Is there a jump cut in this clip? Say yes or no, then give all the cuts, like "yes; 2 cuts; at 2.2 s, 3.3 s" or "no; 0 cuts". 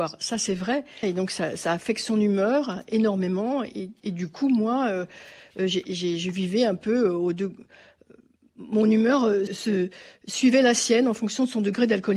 yes; 2 cuts; at 1.0 s, 9.5 s